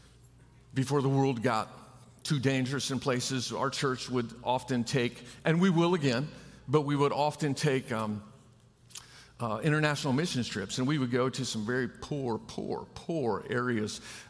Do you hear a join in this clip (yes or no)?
no